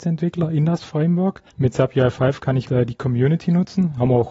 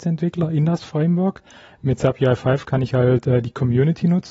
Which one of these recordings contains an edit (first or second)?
first